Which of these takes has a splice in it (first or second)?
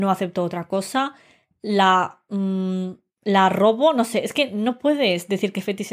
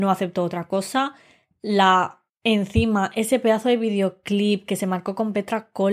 second